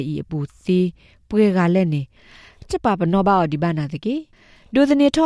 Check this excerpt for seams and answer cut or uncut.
cut